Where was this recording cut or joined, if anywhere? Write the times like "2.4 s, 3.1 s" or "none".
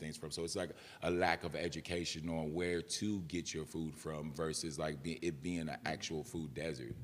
none